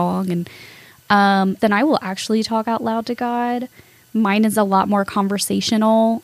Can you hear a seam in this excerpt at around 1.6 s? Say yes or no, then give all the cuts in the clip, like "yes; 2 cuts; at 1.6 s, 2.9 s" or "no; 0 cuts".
yes; 1 cut; at 1.6 s